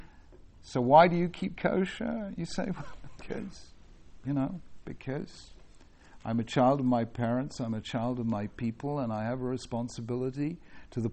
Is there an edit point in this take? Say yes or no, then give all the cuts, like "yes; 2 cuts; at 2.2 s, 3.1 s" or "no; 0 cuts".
no; 0 cuts